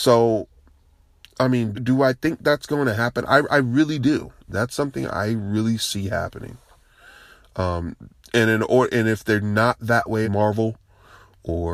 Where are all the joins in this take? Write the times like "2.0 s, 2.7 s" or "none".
1.7 s, 10.2 s